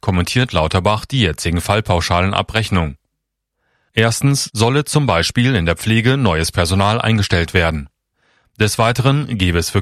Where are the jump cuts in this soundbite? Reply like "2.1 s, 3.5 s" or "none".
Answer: 3.9 s